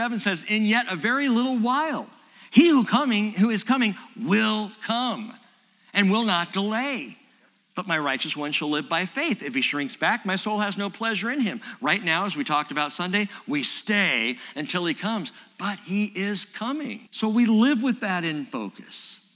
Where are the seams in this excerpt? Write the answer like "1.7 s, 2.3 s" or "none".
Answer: 17.1 s